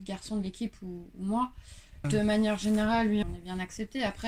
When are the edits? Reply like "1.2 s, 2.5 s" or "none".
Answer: 2.0 s, 3.2 s